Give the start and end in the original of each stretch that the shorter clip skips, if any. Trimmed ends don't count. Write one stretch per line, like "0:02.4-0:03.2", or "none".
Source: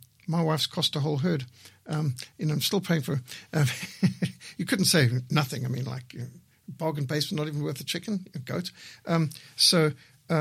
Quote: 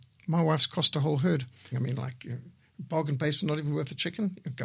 0:01.7-0:05.6